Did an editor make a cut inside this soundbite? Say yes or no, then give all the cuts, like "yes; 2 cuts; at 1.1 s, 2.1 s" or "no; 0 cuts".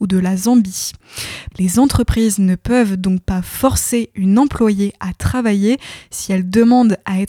yes; 1 cut; at 1.5 s